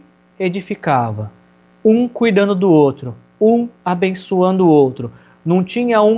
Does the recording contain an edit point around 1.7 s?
no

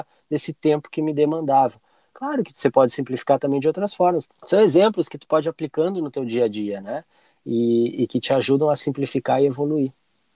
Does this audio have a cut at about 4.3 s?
yes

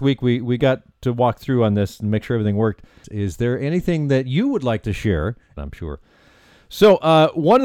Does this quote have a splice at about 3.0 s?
yes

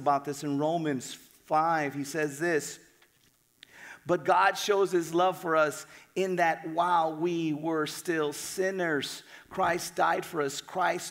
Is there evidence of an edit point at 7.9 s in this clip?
no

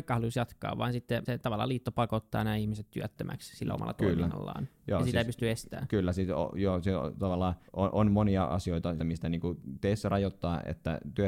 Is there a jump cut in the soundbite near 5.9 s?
no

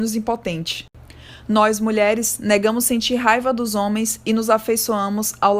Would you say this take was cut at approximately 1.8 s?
no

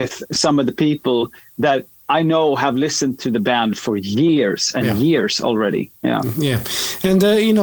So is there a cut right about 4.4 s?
no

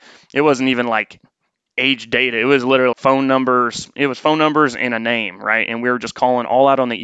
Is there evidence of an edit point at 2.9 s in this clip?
yes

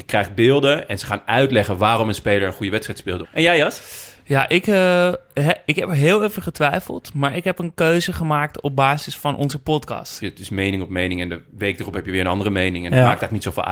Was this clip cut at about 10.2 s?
yes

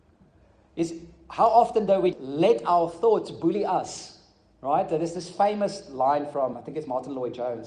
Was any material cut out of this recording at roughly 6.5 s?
yes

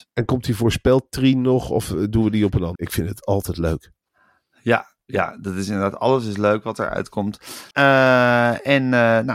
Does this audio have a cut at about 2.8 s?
yes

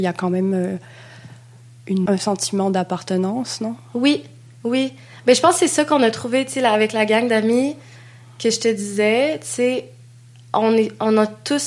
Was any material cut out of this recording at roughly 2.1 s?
yes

